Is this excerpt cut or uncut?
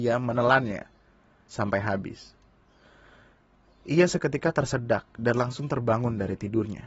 uncut